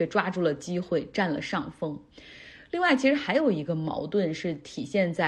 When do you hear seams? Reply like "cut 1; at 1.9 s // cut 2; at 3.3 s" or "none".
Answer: none